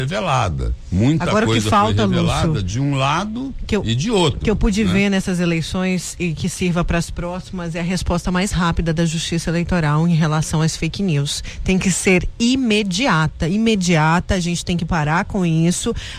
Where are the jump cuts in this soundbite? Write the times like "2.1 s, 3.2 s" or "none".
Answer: none